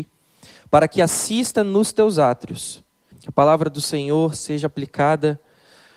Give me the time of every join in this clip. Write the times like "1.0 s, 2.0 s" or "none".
3.1 s